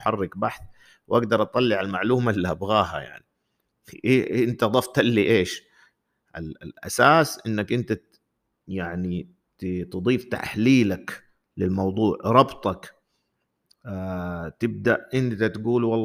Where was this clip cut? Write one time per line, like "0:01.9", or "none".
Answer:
none